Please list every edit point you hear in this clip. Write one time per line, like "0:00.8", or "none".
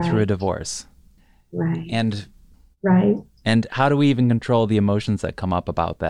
none